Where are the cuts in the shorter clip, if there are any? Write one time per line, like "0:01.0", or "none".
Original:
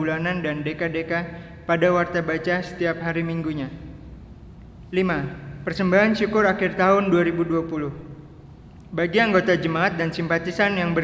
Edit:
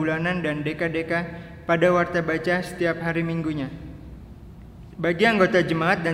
0:04.9